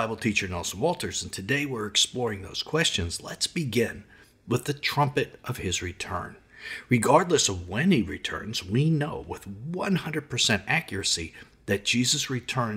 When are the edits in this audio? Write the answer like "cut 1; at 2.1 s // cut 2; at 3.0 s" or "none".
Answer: none